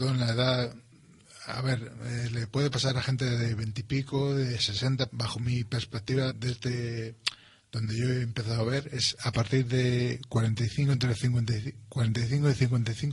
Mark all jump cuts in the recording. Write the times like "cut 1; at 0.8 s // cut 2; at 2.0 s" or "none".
cut 1; at 5.1 s // cut 2; at 6.3 s